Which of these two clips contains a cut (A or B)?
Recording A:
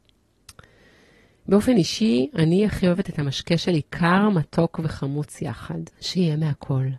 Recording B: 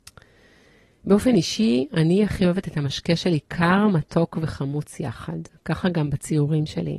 A